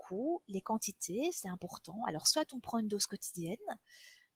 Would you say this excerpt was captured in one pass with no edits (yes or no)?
yes